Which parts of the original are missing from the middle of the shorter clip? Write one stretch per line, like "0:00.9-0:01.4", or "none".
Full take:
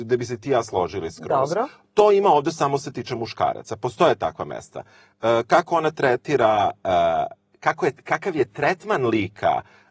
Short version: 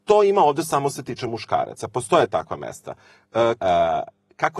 0:05.5-0:06.8